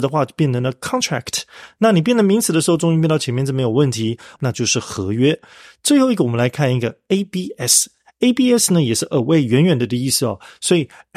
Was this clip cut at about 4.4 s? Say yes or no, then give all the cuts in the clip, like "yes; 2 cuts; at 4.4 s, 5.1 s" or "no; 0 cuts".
yes; 1 cut; at 4.4 s